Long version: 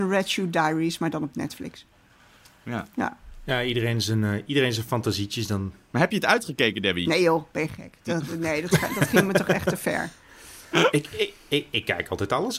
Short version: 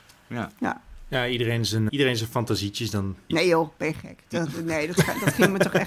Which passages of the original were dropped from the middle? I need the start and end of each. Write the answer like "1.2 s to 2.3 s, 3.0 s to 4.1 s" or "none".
4.2 s to 4.4 s, 5.9 s to 7.0 s

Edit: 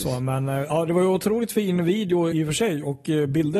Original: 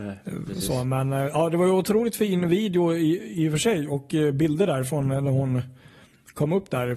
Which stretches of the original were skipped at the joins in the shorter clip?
3.0 s to 3.4 s

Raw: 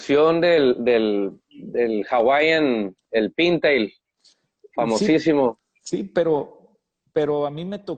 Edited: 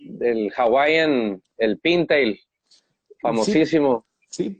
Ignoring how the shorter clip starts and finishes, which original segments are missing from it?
none

